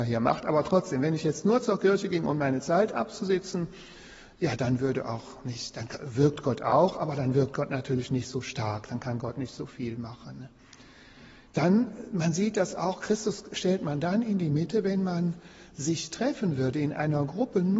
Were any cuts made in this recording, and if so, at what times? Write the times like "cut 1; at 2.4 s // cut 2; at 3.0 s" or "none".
none